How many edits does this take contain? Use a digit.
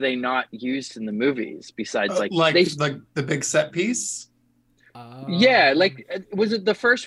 0